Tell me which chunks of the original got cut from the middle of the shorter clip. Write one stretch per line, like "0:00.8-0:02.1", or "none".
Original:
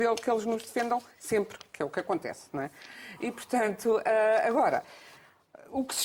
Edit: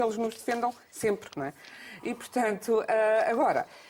0:01.6-0:02.5